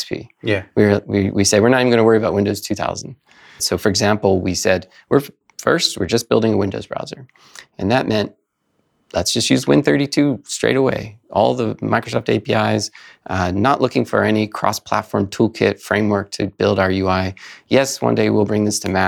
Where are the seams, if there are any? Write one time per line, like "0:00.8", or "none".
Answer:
0:03.6

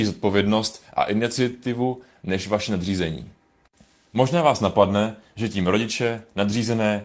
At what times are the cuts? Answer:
none

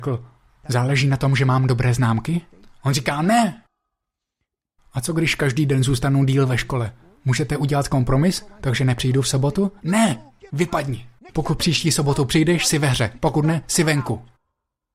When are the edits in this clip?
none

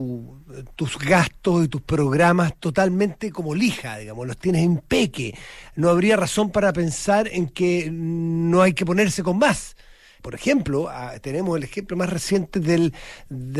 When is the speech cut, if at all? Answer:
0:10.2

